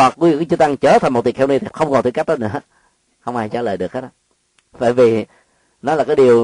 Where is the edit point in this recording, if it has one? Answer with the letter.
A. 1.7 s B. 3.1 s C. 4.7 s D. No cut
A